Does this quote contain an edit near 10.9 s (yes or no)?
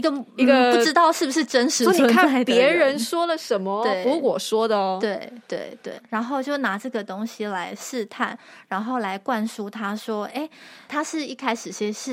yes